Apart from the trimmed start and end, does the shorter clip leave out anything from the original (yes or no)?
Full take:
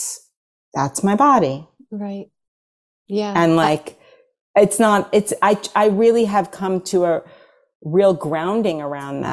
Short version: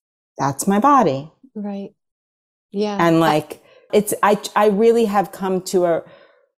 yes